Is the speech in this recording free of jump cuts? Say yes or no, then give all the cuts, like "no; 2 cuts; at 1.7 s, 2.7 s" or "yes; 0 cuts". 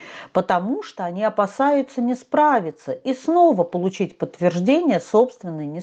yes; 0 cuts